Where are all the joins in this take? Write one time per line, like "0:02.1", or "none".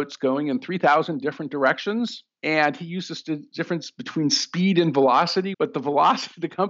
0:05.5